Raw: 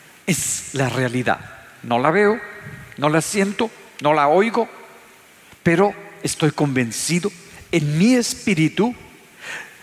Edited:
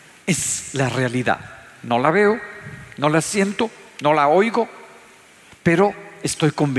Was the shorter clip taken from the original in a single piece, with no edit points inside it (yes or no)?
yes